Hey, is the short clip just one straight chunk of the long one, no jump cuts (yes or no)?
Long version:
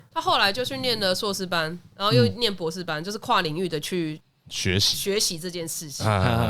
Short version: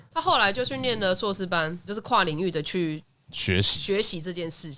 no